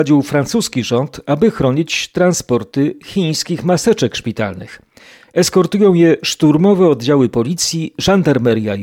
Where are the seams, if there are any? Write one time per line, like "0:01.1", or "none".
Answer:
none